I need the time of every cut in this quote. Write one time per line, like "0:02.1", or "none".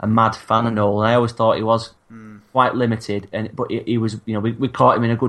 none